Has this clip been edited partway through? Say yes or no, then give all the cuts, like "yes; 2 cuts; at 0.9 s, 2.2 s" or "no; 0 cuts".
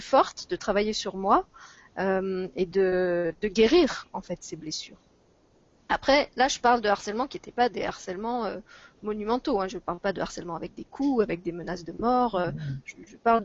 no; 0 cuts